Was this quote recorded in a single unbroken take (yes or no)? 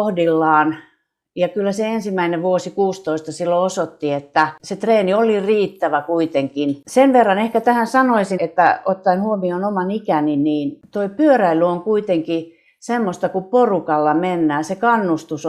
no